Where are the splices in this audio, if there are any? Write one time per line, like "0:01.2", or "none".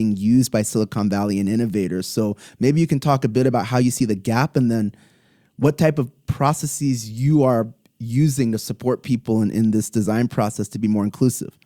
none